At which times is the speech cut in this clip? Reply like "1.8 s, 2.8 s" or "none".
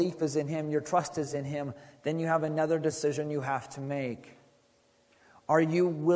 none